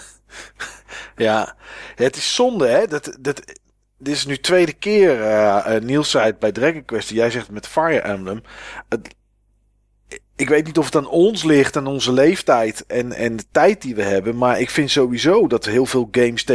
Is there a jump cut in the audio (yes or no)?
no